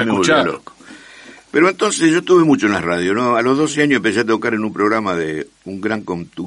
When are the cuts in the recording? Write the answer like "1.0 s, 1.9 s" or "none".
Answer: none